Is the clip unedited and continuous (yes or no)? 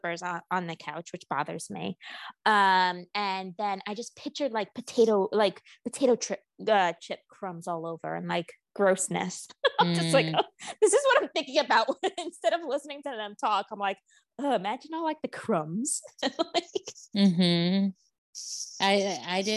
yes